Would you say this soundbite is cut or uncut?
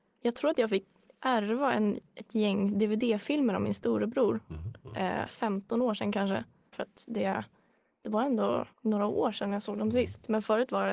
cut